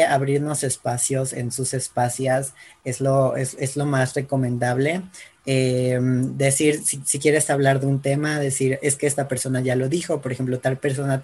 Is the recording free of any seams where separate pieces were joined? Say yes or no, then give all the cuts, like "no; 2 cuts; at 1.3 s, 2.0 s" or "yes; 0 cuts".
yes; 0 cuts